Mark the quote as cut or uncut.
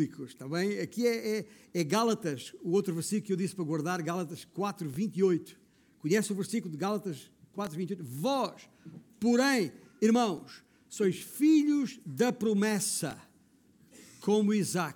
uncut